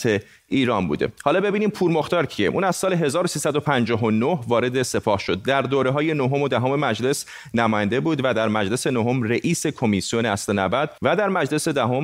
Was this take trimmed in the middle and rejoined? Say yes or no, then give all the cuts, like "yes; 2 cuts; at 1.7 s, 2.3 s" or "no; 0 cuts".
yes; 1 cut; at 11.0 s